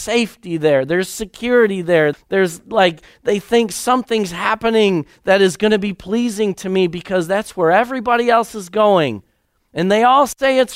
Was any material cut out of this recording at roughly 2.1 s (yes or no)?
yes